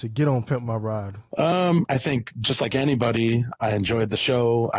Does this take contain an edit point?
yes; 2 cuts; at 1.9 s, 3.5 s

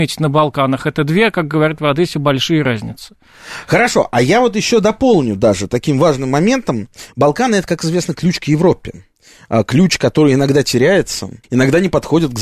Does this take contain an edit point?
yes; 1 cut; at 11.4 s

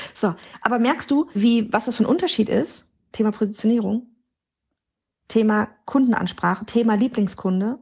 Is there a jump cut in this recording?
yes; 2 cuts; at 1.3 s, 3.1 s

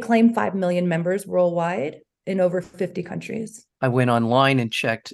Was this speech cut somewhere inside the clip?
yes; 1 cut; at 3.7 s

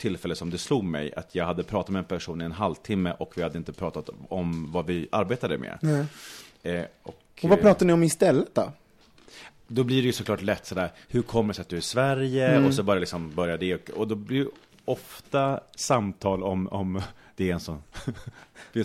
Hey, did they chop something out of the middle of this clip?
no; 0 cuts

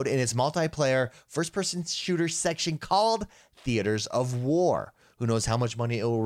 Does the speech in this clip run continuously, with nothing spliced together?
yes; 0 cuts

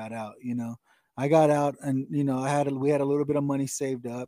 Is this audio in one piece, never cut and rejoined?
yes; 0 cuts

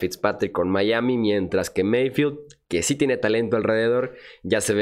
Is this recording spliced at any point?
no; 0 cuts

